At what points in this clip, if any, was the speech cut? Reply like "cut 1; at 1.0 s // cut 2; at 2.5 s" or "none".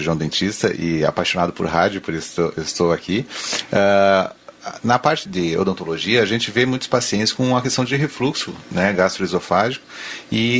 cut 1; at 5.3 s